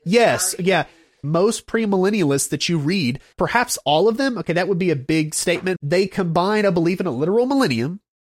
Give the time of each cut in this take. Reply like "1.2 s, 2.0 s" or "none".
1.2 s, 3.3 s, 5.8 s